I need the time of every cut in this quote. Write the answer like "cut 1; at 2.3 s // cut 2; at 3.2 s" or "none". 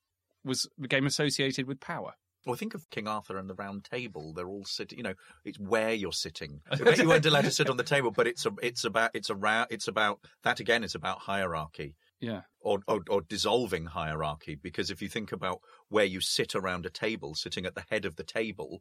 cut 1; at 6.6 s